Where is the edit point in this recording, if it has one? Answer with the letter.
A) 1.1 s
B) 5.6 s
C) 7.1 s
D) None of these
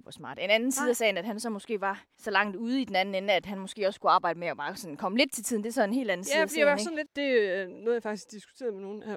C